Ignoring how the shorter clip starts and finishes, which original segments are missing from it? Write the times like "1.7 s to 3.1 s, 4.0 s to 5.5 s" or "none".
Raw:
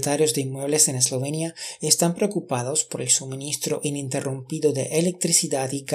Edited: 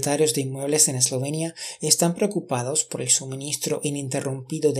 none